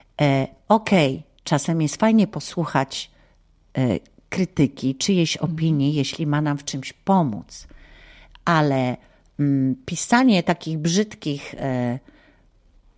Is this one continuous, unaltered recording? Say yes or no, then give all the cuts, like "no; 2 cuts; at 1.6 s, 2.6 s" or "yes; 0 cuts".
yes; 0 cuts